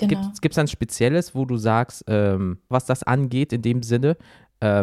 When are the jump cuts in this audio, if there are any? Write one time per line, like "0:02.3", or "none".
0:02.7